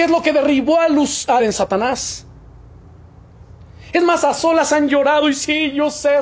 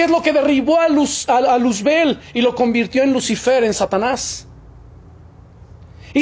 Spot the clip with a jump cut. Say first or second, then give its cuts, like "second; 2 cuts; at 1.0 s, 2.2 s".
first; 2 cuts; at 1.4 s, 3.9 s